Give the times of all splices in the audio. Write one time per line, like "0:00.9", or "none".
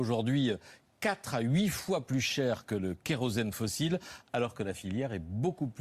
none